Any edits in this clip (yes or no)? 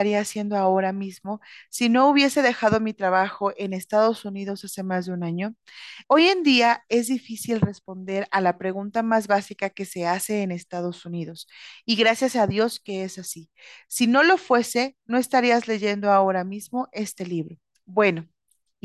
yes